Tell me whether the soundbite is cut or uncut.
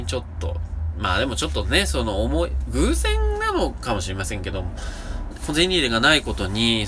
cut